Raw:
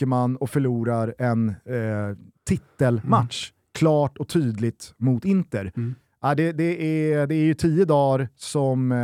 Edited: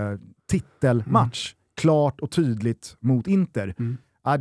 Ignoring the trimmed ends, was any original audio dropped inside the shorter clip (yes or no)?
no